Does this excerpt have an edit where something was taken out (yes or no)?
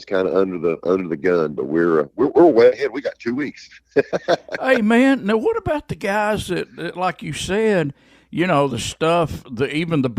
no